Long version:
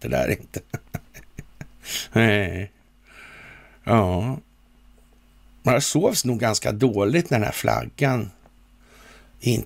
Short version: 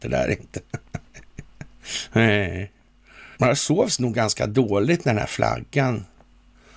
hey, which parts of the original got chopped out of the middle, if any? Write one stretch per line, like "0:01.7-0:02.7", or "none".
0:03.3-0:05.6